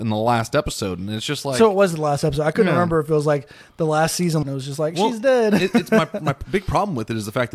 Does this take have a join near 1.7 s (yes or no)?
no